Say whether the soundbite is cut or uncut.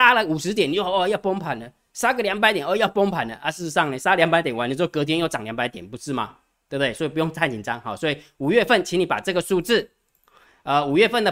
uncut